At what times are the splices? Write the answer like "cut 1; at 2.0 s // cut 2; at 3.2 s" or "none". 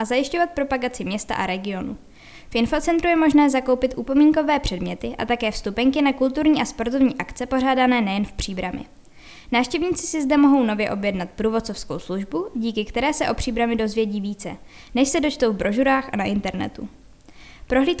none